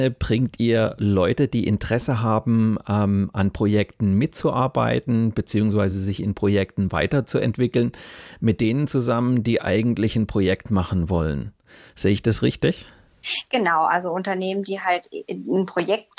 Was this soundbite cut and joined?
no; 0 cuts

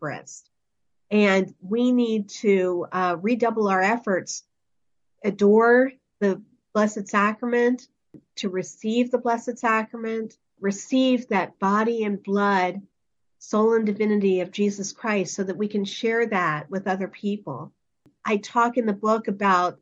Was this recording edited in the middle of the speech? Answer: no; 0 cuts

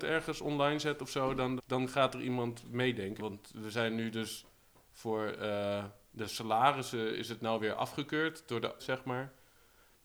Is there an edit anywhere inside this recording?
yes; 3 cuts; at 1.6 s, 3.2 s, 8.8 s

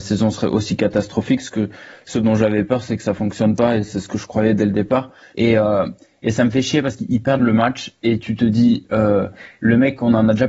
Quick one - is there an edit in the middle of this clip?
yes; 1 cut; at 5.3 s

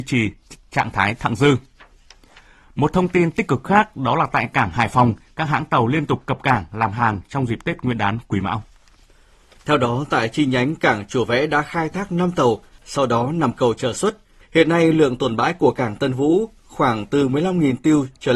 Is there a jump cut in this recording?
yes; 2 cuts; at 12.8 s, 14.4 s

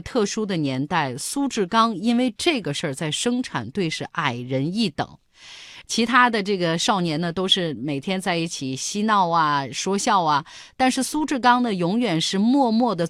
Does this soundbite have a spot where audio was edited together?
yes; 1 cut; at 5.8 s

